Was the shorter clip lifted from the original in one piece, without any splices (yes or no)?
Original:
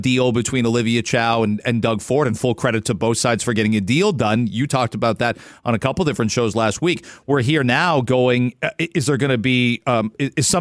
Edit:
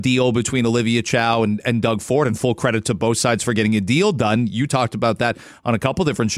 yes